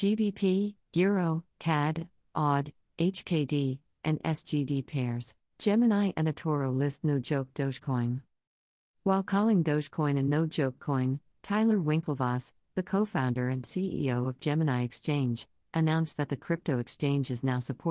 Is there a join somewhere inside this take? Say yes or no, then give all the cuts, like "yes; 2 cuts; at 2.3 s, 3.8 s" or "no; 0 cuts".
yes; 1 cut; at 5.5 s